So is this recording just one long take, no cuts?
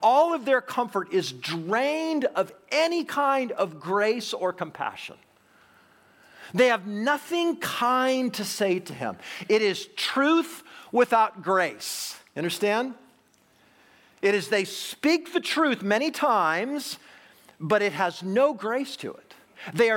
yes; 0 cuts

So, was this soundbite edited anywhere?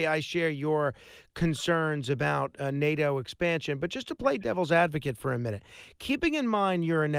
no; 0 cuts

